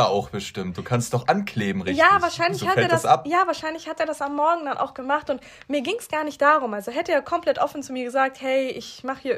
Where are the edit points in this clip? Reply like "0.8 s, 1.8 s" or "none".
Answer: none

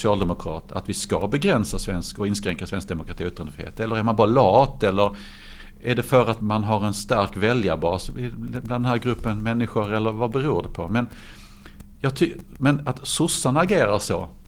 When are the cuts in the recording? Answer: 6.4 s

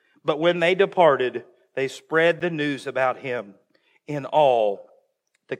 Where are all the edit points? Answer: none

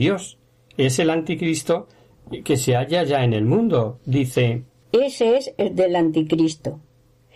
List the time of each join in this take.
4.8 s

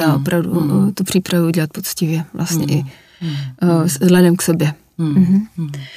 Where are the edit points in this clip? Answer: none

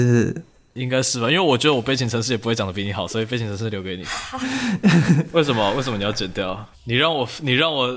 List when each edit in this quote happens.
4.4 s, 6.7 s

